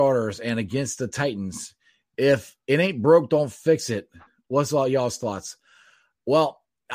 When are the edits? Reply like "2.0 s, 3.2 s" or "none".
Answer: none